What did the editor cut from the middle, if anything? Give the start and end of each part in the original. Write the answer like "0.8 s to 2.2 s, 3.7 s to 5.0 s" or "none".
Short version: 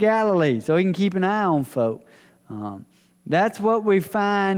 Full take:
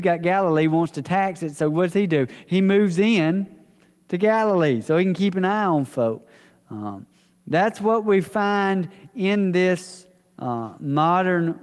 none